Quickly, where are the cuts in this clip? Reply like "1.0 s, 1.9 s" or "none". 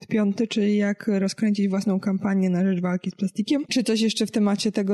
3.7 s